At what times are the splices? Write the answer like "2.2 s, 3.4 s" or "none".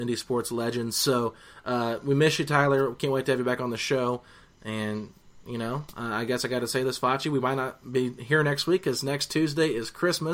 none